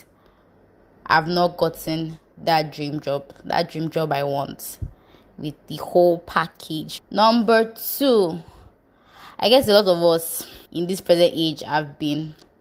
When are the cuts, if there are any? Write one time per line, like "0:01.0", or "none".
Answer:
0:07.0
0:10.7